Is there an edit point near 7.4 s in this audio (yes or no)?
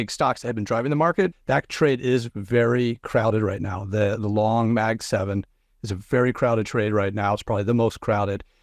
no